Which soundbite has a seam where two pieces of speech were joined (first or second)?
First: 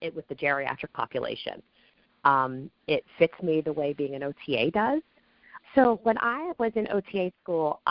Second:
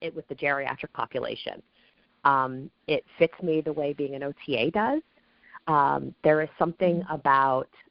first